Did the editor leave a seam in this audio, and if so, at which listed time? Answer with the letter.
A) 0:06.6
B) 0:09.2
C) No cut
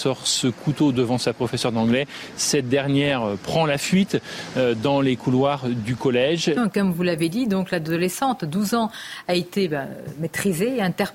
A